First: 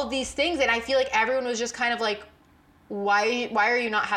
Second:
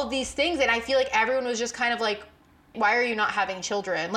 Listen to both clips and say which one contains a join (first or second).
second